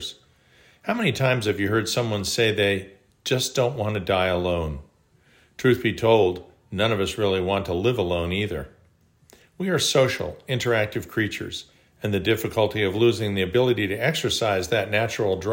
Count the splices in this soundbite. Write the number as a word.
zero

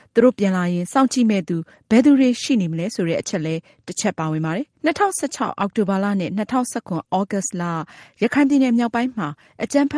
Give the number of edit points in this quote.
one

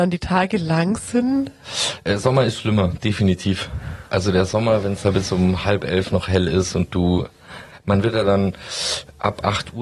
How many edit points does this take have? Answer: zero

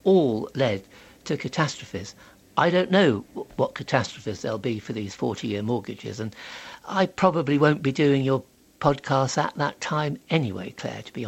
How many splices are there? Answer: zero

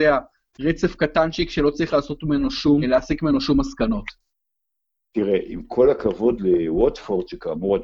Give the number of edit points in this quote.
one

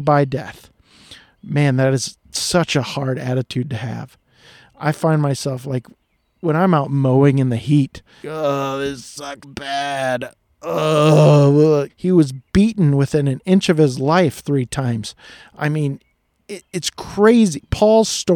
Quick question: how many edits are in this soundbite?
three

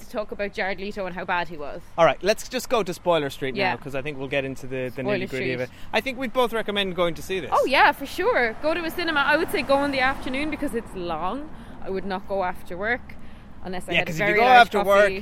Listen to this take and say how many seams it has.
zero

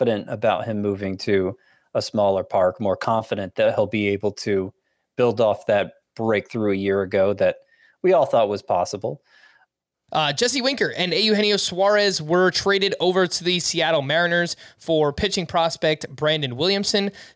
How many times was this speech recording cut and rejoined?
one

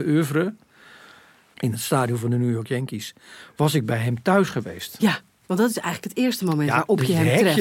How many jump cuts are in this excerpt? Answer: one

